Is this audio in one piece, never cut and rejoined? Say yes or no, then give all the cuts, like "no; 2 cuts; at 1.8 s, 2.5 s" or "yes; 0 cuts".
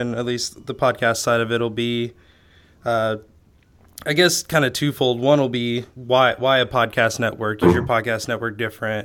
no; 2 cuts; at 5.9 s, 7.6 s